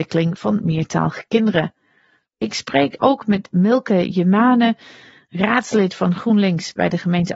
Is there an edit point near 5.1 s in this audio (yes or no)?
no